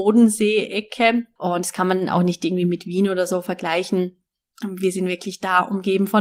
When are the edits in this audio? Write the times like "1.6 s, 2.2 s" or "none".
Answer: 1.4 s